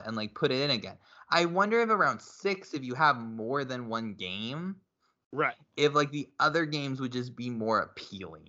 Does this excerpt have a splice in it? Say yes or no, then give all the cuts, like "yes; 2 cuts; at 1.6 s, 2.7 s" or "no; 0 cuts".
no; 0 cuts